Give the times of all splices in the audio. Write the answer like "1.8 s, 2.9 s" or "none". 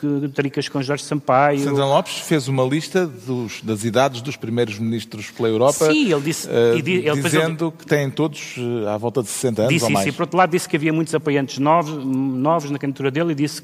none